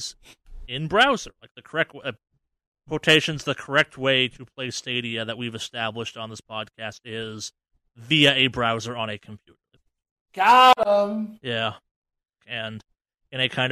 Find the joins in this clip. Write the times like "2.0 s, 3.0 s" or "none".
9.8 s, 12.4 s